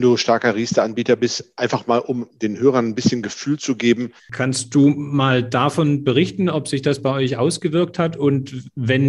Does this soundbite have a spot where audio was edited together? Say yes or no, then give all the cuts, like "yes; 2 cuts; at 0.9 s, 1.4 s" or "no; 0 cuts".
yes; 1 cut; at 4.2 s